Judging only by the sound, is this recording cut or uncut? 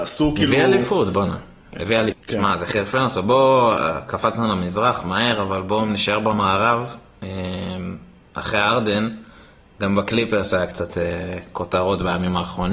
cut